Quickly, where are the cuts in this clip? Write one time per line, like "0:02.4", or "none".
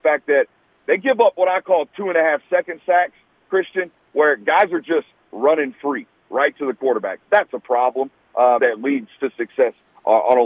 0:08.6